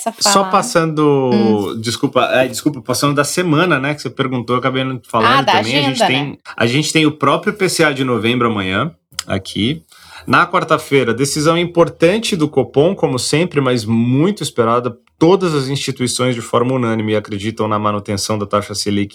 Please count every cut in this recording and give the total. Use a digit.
0